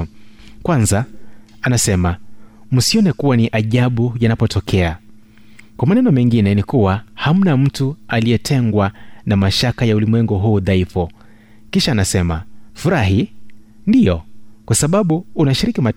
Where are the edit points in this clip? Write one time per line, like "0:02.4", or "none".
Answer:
0:12.7